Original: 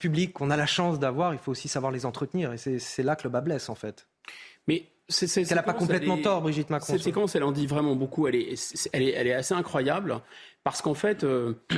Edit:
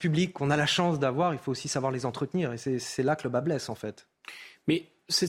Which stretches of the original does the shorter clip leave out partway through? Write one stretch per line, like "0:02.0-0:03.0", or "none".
none